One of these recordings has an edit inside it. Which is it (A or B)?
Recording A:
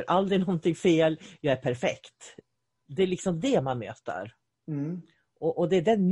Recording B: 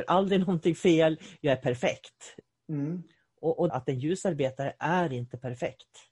B